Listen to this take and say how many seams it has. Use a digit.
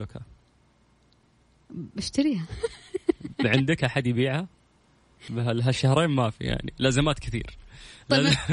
1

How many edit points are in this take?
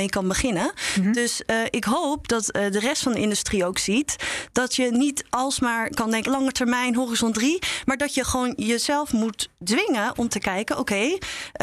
1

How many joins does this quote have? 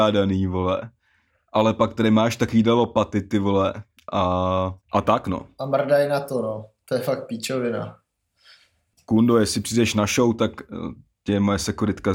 1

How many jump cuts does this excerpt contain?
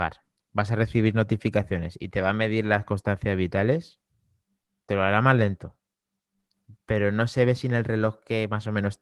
1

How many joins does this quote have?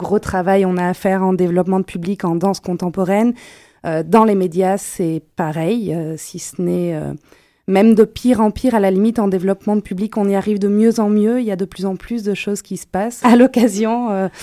1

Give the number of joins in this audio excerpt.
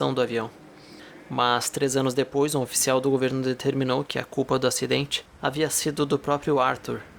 1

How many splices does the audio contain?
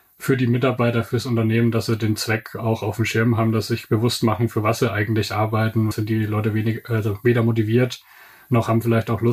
1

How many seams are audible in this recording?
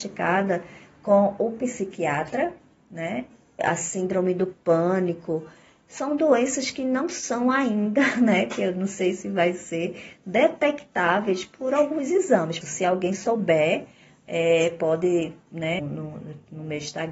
3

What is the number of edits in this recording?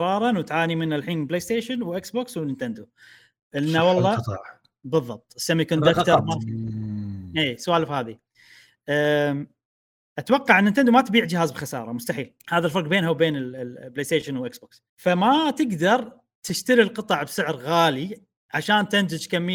2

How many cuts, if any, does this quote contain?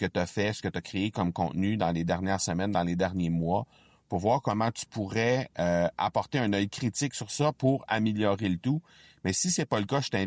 0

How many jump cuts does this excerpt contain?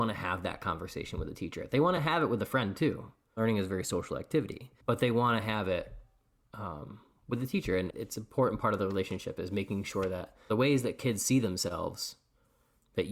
2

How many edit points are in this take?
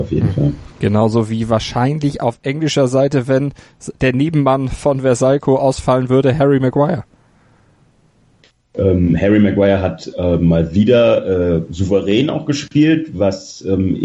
0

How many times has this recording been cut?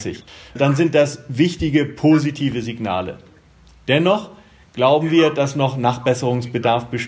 0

